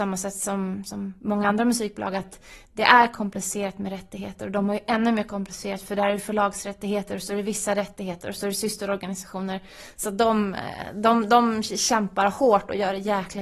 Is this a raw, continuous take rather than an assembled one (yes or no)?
yes